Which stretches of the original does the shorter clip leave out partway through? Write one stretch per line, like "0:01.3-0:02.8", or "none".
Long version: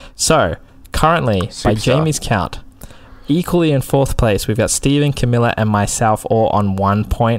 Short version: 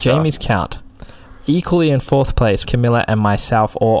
0:04.5-0:05.1